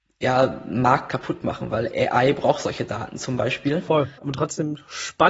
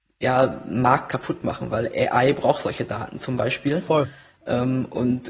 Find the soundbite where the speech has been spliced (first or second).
first